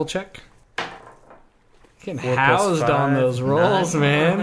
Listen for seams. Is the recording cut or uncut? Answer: uncut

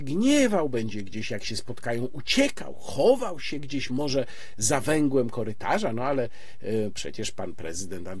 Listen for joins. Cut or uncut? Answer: uncut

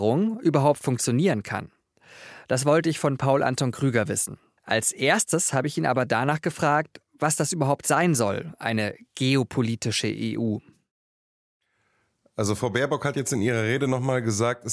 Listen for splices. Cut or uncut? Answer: cut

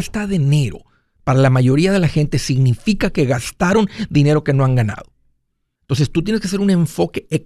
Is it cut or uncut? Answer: cut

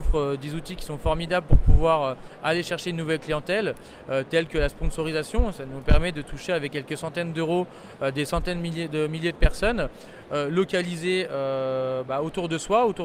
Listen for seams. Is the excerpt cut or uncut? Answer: uncut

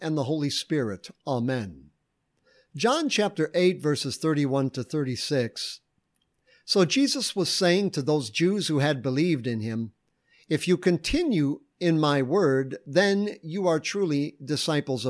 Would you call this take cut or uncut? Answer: uncut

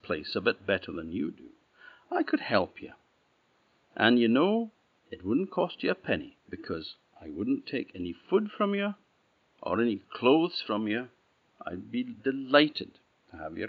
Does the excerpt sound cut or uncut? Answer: cut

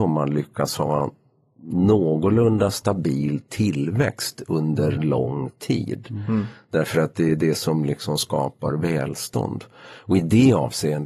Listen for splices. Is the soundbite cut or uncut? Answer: uncut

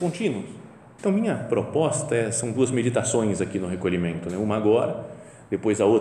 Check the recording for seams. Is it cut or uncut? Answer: cut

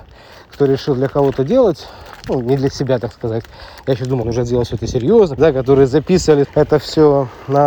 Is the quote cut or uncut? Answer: cut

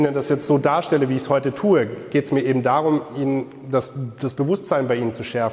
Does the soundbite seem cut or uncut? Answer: uncut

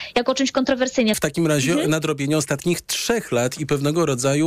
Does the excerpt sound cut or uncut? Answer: cut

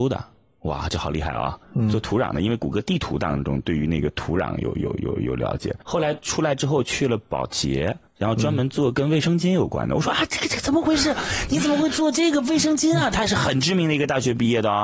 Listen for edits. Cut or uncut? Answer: uncut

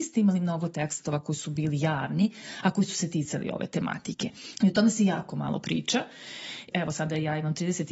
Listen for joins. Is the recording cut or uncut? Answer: cut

